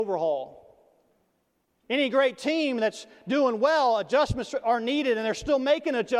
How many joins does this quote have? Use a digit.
1